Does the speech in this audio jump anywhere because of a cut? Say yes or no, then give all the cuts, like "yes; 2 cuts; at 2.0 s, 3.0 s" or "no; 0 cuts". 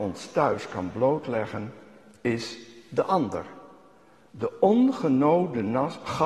no; 0 cuts